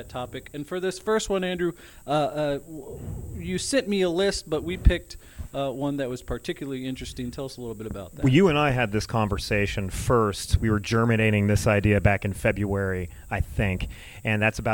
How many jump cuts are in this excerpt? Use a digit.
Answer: 0